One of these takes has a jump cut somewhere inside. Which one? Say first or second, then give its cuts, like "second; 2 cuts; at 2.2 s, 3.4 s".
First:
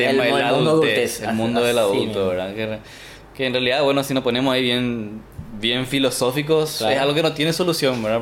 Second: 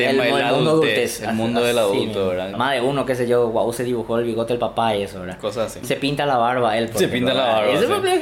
second; 2 cuts; at 2.5 s, 5.8 s